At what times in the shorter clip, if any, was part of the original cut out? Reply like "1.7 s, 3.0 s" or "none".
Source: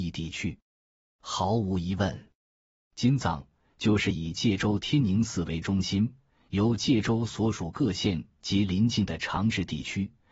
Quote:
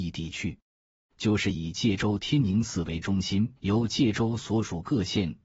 1.1 s, 3.6 s